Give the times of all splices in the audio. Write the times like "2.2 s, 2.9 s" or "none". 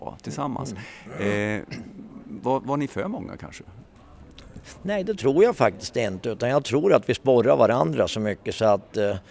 none